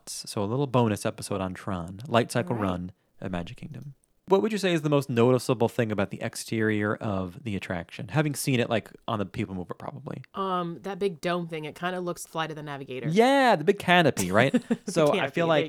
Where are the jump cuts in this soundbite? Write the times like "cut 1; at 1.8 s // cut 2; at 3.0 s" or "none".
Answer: cut 1; at 10.3 s // cut 2; at 12.2 s

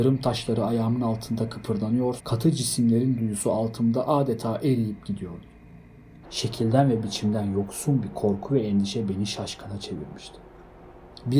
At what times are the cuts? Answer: cut 1; at 2.2 s // cut 2; at 6.2 s

